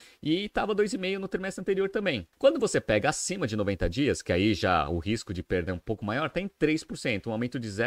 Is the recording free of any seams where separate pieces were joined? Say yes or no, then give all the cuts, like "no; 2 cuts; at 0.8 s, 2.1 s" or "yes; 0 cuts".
no; 1 cut; at 2.3 s